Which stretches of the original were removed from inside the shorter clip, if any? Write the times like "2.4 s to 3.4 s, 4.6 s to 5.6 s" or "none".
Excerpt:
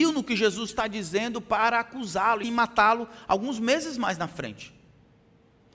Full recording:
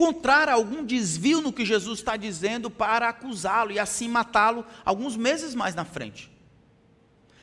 3.7 s to 4.0 s